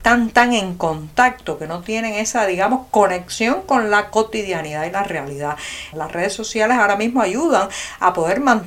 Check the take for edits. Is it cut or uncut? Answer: cut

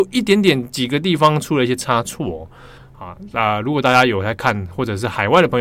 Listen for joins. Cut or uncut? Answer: cut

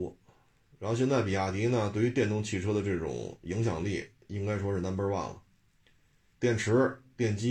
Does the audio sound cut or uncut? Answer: cut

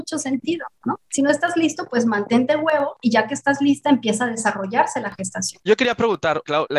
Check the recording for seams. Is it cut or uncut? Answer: cut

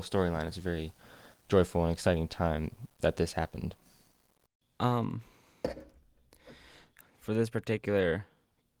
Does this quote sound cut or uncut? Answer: cut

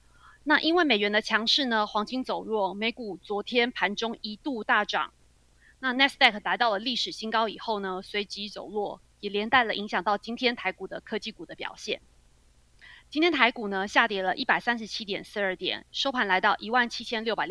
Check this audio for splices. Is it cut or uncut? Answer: cut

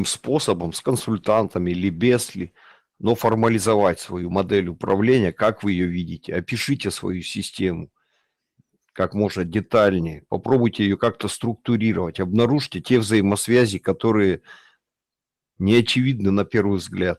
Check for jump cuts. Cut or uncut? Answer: uncut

